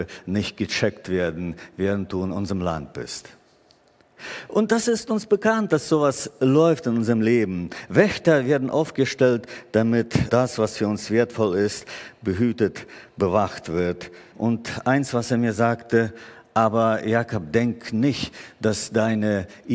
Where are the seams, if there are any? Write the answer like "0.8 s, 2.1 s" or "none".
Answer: 10.3 s, 14.3 s